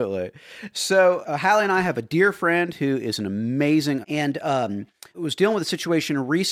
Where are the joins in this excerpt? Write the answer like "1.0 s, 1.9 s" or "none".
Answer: 1.2 s, 4.0 s, 5.1 s